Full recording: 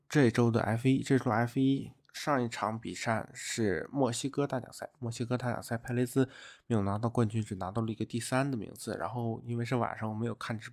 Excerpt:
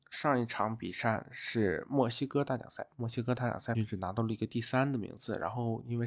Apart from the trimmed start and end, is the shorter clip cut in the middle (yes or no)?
yes